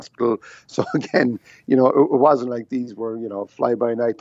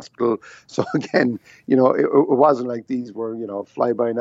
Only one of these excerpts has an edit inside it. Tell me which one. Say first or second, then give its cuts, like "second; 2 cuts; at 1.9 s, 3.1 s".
first; 1 cut; at 1.9 s